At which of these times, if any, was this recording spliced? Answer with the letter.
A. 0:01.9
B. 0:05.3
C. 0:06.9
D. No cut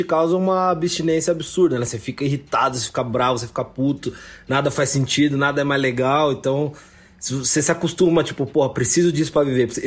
D